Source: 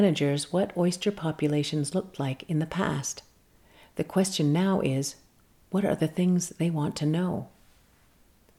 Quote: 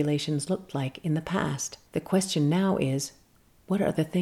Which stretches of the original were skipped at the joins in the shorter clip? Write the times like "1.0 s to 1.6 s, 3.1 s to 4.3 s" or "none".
3.3 s to 3.9 s